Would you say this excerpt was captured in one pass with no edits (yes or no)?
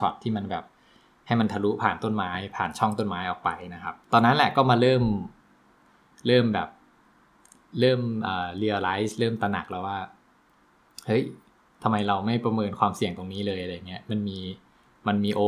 no